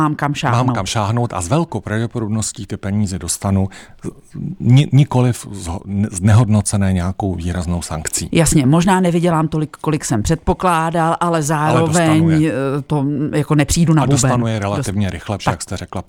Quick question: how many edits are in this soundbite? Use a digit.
1